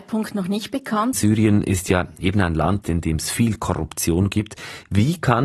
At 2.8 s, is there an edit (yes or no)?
yes